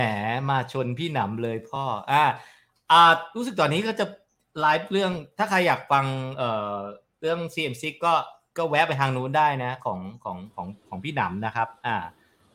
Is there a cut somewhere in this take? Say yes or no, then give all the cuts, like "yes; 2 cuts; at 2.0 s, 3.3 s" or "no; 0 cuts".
no; 0 cuts